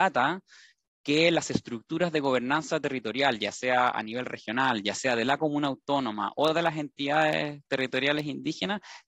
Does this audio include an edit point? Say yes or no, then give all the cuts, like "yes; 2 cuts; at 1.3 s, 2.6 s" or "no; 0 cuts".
no; 0 cuts